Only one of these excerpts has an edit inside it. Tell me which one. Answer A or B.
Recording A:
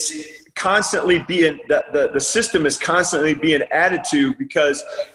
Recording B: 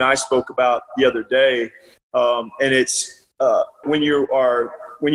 B